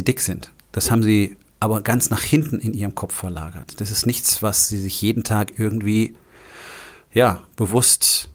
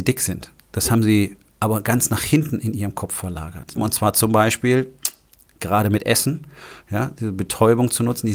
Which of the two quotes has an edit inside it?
second; 1 cut; at 3.8 s

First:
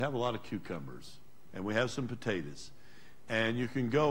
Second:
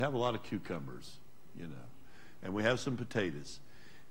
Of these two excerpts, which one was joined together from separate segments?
first; 1 cut; at 1.5 s

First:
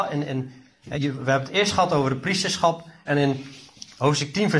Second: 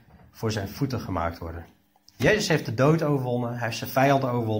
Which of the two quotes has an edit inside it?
first; 2 cuts; at 0.9 s, 3.1 s

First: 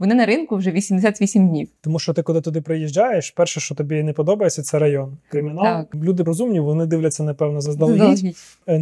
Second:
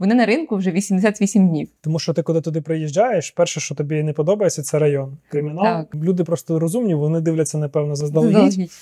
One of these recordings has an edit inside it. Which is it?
first; 1 cut; at 6.3 s

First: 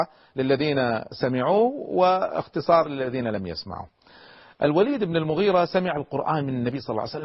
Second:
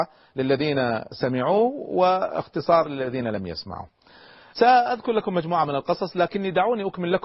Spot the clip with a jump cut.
second; 1 cut; at 4.5 s

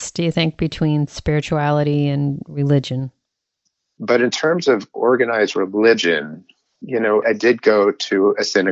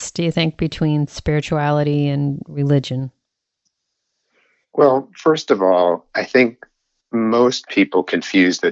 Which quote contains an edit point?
first; 2 cuts; at 4.0 s, 7.2 s

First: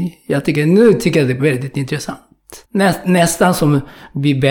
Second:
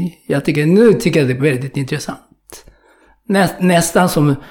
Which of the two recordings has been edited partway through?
first; 1 cut; at 2.6 s

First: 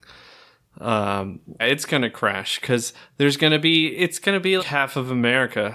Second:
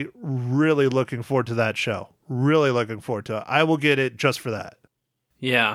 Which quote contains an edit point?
first; 2 cuts; at 1.6 s, 4.6 s

